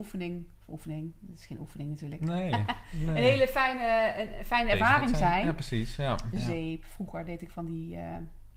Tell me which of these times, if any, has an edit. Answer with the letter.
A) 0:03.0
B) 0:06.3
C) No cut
B